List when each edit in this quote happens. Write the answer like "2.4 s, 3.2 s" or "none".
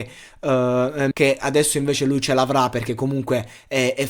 1.1 s